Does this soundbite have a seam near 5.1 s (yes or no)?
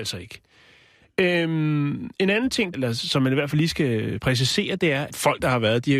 yes